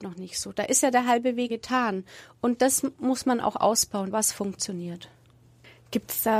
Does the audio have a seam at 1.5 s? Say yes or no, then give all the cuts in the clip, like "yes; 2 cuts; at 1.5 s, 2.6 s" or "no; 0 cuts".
yes; 2 cuts; at 1.5 s, 4.1 s